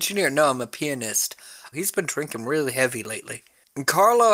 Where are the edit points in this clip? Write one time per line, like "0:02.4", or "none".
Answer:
0:01.7